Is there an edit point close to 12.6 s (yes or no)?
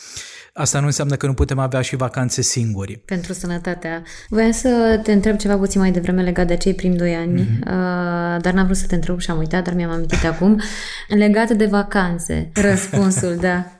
yes